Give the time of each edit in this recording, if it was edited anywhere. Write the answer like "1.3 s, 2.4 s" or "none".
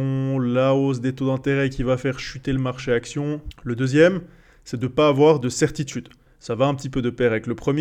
3.5 s, 6.3 s